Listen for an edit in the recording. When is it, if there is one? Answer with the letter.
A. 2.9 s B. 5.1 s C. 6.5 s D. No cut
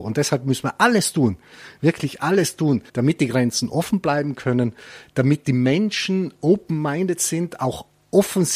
A